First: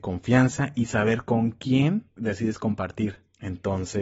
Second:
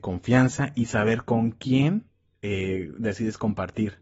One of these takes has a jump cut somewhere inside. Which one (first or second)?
first